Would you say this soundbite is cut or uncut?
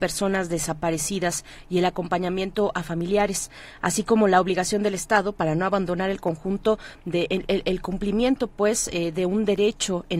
uncut